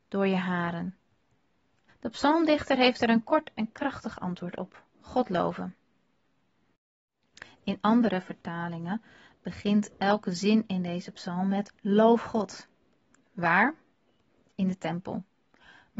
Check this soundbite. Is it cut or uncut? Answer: cut